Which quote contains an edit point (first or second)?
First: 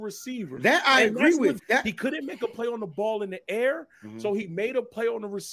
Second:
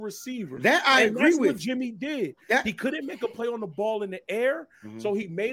first